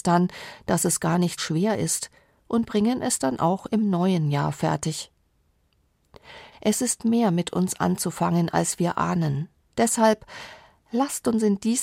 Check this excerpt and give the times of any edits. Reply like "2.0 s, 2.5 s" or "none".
1.4 s, 6.5 s, 9.7 s